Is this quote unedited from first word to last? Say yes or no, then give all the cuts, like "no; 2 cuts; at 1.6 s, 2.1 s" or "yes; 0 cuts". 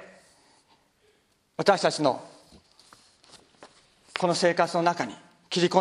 yes; 0 cuts